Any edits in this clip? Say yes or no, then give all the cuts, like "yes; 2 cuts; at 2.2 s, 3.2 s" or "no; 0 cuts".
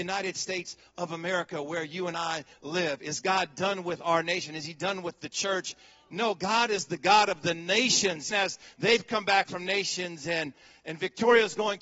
yes; 1 cut; at 8.3 s